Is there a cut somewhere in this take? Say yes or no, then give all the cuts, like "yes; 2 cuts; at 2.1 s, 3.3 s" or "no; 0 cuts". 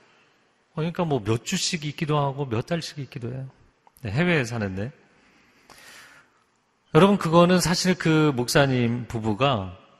no; 0 cuts